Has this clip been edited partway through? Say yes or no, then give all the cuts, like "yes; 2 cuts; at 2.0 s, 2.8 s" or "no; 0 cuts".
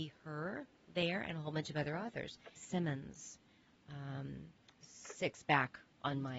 yes; 2 cuts; at 2.6 s, 4.8 s